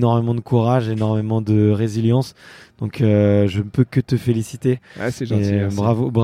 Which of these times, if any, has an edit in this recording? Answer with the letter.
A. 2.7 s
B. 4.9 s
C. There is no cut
C